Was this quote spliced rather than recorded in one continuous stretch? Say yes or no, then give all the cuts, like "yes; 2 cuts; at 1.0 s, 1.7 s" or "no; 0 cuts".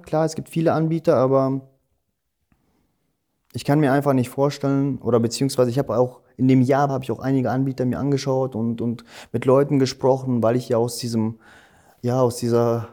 yes; 1 cut; at 6.9 s